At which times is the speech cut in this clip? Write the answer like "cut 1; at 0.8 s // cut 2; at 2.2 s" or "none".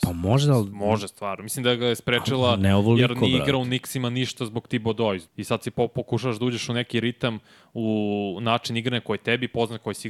cut 1; at 5.3 s